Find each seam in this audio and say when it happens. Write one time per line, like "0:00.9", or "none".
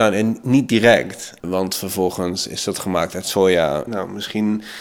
0:01.4
0:03.9